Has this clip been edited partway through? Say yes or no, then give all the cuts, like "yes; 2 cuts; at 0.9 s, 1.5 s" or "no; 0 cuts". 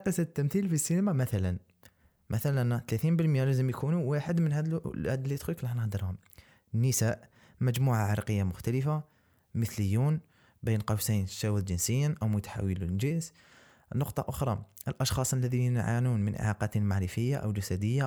no; 0 cuts